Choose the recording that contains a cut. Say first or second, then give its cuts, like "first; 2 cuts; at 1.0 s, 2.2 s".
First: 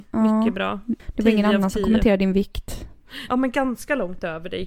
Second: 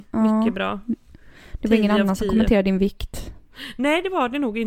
first; 2 cuts; at 1.0 s, 3.3 s